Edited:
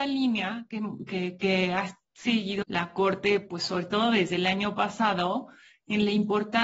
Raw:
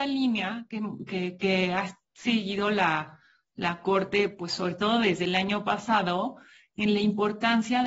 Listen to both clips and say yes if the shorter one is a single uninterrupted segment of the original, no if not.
no